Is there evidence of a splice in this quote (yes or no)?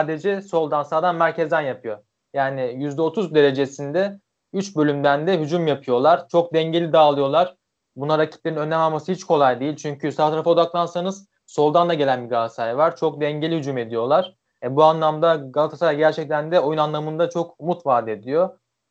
no